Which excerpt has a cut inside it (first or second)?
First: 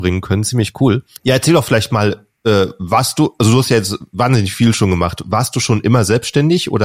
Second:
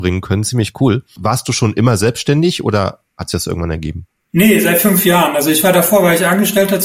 second